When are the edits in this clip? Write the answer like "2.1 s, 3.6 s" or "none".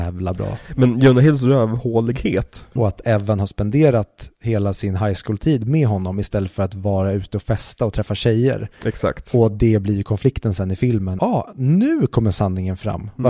2.8 s, 11.2 s